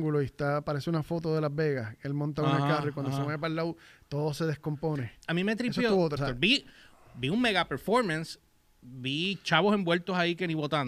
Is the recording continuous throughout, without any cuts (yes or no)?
no